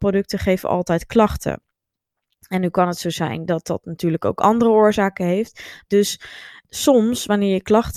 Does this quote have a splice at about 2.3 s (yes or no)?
no